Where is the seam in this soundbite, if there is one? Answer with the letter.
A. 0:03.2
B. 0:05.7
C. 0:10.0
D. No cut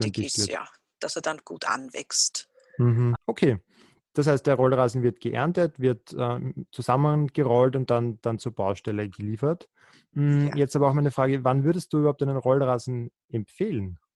A